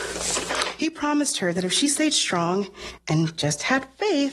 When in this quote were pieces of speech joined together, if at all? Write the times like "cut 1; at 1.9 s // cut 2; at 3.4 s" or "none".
none